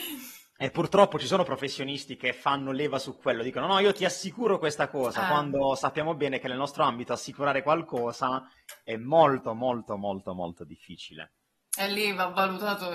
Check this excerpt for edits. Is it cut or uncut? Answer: uncut